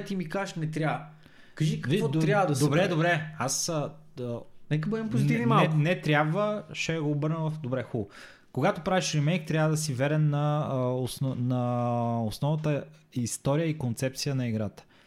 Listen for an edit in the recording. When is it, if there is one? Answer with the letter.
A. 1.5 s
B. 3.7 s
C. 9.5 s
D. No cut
D